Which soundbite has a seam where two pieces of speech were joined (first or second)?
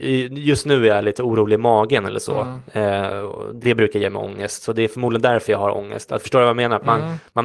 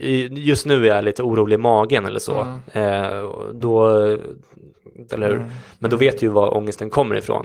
second